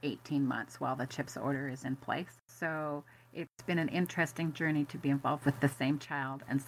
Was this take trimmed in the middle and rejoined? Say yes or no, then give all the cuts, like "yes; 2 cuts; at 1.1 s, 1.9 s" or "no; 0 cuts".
no; 0 cuts